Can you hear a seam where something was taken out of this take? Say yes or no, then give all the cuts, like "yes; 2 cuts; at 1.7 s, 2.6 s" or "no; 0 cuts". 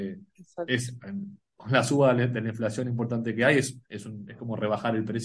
yes; 1 cut; at 3.8 s